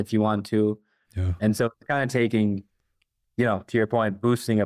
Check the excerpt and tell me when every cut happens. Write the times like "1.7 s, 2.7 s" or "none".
1.0 s